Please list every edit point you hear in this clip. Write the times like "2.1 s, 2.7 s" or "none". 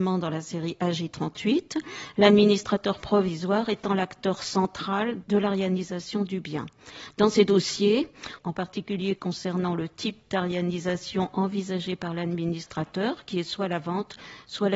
5.2 s, 8.4 s